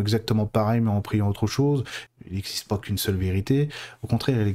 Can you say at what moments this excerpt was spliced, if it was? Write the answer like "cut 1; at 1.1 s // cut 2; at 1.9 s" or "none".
cut 1; at 2.1 s